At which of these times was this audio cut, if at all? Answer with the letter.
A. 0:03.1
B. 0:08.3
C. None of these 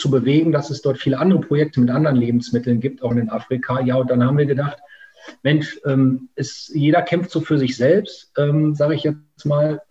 A